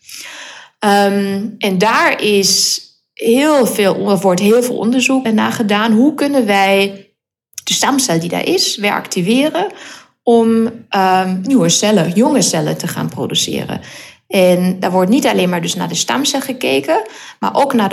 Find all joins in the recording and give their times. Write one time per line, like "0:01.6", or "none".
0:05.2